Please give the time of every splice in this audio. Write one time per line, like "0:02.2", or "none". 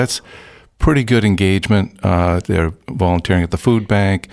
0:02.4